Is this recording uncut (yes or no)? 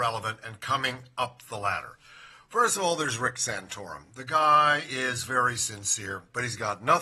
yes